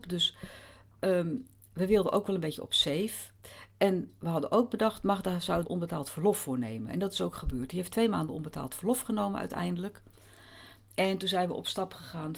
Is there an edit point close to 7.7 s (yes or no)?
no